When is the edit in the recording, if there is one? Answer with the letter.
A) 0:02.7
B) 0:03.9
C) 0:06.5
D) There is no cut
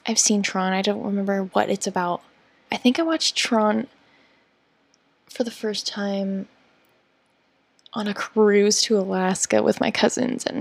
A